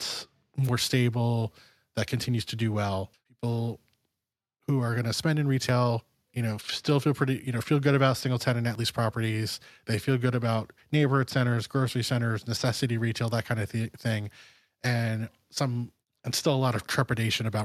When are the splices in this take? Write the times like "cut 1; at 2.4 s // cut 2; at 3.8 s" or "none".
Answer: cut 1; at 3.1 s